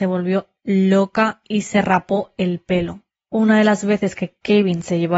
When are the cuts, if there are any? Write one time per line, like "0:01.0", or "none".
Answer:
0:03.2